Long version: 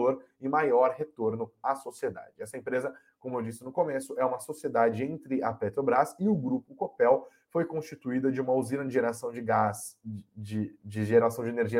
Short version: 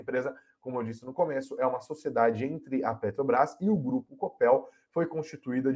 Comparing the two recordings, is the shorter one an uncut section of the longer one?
yes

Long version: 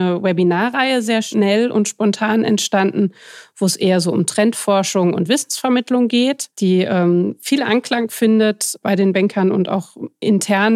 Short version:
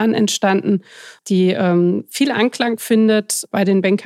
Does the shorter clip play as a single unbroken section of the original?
no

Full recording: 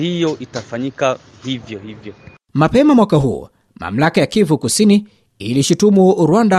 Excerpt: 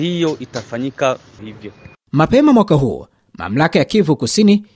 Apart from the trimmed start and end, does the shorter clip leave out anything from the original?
yes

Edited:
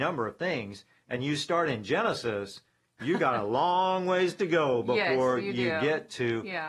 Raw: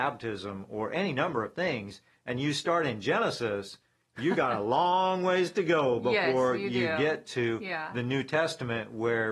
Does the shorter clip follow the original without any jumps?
yes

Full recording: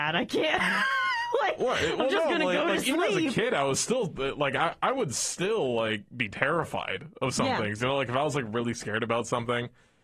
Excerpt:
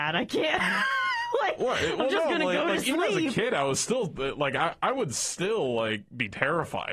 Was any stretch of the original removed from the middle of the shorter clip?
no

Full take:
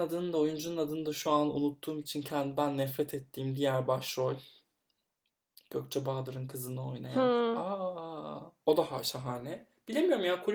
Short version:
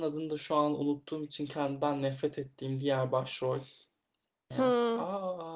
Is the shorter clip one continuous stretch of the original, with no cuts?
no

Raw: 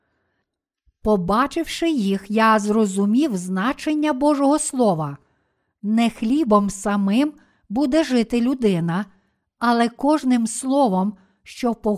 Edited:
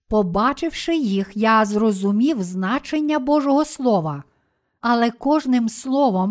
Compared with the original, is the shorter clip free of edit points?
no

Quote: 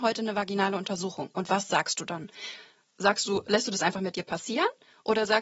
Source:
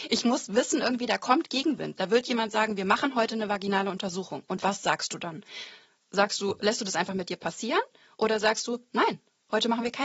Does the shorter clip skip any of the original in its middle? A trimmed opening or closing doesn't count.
no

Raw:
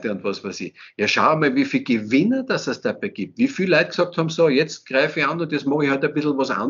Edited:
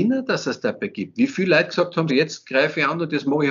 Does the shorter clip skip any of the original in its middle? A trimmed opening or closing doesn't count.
yes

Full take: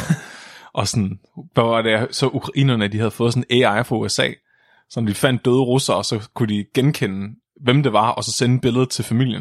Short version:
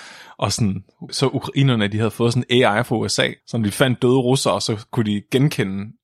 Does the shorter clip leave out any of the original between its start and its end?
yes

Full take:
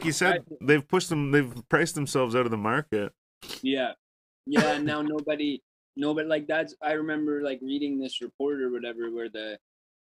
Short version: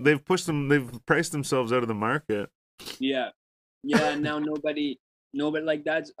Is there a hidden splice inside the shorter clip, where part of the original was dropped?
no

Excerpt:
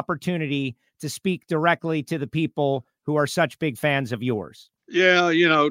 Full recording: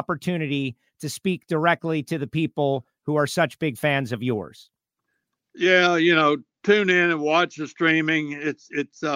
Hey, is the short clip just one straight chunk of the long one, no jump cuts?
no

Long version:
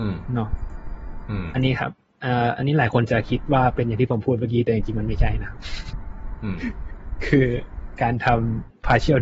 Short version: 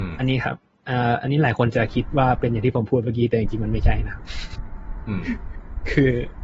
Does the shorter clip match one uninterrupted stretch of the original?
yes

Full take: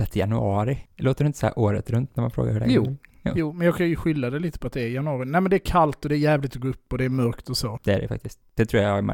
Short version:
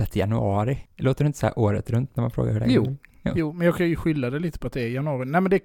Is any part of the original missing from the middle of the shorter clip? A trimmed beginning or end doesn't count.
no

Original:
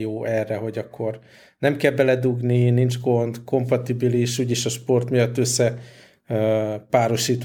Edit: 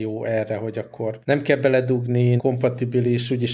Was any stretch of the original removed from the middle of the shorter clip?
yes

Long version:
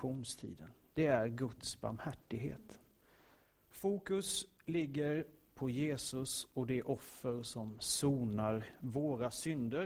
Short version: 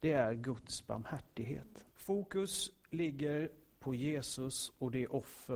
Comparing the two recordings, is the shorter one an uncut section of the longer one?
no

